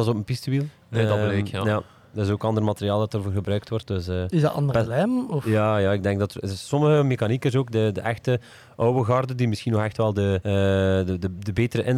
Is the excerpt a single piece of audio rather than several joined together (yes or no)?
no